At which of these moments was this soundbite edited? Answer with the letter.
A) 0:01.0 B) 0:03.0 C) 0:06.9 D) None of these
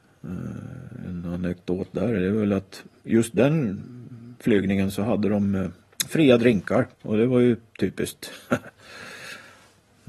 C